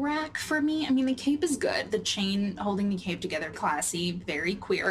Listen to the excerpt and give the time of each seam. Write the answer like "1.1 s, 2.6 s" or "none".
3.5 s